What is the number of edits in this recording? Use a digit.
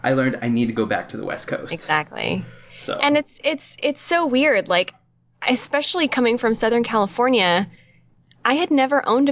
0